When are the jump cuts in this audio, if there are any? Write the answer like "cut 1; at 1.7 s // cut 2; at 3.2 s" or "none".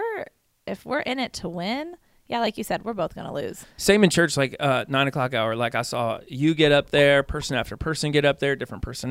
none